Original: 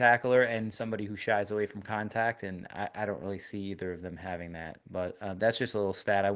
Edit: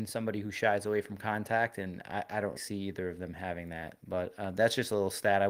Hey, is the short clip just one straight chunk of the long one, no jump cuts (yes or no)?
no